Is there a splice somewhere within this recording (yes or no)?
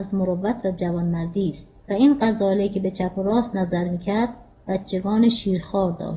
no